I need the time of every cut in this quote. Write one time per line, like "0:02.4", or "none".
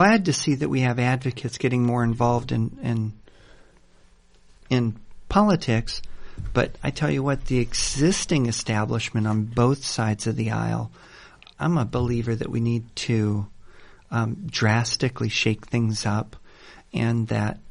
0:11.5